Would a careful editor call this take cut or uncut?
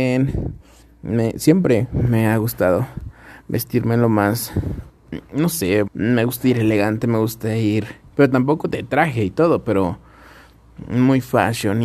cut